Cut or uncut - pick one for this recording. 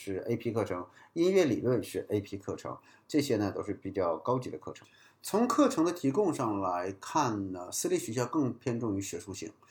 uncut